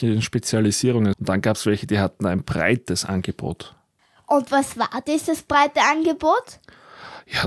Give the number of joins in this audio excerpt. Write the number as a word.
one